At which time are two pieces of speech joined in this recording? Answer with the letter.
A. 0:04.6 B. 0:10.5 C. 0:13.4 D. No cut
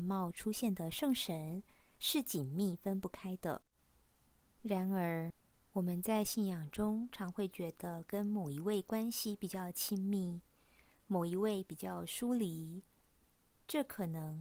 A